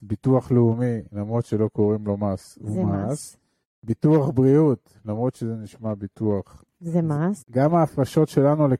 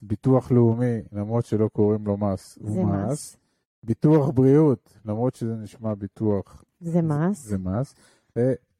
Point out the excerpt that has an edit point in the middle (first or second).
first